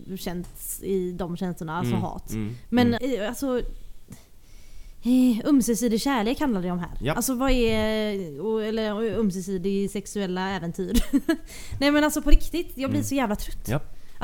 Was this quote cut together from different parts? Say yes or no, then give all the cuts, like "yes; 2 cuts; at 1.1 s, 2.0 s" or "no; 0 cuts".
yes; 1 cut; at 3.0 s